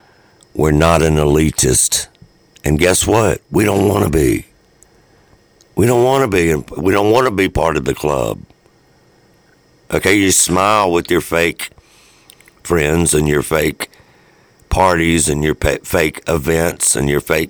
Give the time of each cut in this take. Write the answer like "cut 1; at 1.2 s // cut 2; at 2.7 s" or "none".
none